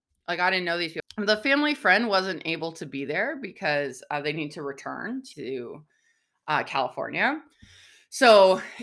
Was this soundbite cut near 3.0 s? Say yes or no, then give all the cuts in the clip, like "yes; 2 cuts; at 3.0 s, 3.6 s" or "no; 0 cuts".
no; 2 cuts; at 1.0 s, 5.3 s